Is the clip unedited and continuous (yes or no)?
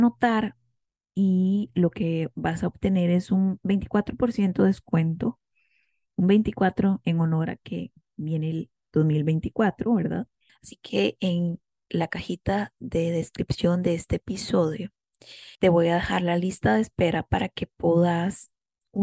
no